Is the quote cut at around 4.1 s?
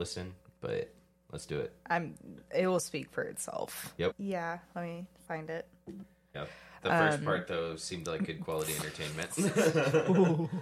yes; 2 cuts; at 4.1 s, 6.3 s

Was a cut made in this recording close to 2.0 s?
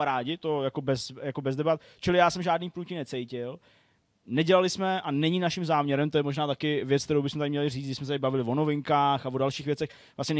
no; 0 cuts

